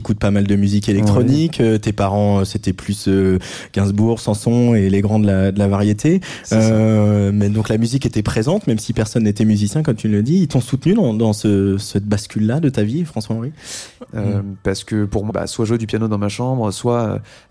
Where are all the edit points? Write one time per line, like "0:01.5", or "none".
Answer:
0:14.1
0:15.3